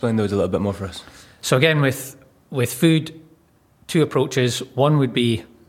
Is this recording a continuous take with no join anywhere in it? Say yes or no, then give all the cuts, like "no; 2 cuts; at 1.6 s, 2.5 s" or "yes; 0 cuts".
yes; 0 cuts